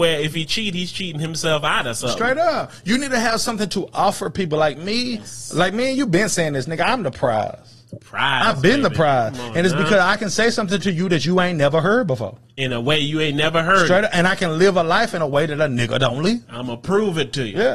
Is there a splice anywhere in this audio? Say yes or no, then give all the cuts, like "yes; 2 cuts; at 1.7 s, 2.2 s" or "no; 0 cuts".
no; 0 cuts